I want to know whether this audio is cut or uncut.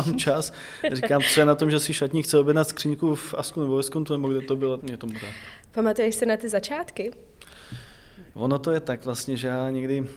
cut